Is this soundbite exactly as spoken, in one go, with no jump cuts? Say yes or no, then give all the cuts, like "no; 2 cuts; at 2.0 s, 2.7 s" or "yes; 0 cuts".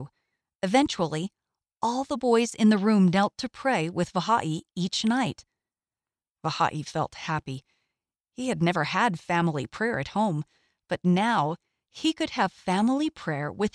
yes; 0 cuts